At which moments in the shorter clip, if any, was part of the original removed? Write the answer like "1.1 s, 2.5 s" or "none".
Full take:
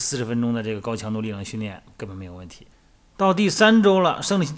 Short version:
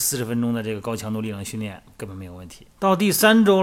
2.7 s